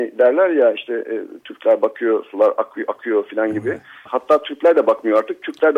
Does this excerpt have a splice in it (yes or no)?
yes